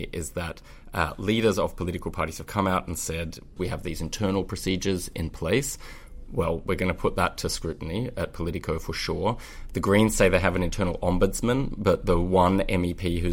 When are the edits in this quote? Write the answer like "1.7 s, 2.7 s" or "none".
3.6 s